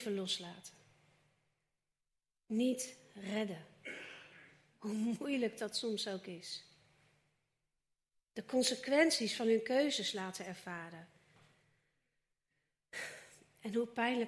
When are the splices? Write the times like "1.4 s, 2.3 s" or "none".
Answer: none